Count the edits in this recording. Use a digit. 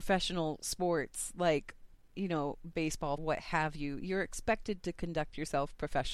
1